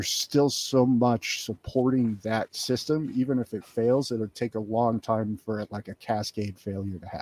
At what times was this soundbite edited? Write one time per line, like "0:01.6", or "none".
none